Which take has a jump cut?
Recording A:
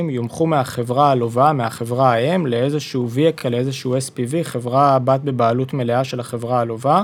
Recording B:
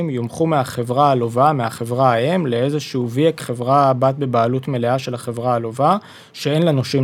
B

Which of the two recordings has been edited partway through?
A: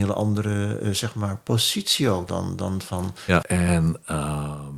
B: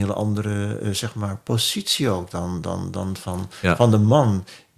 A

